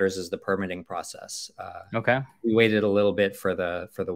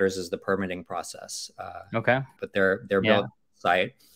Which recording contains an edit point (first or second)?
second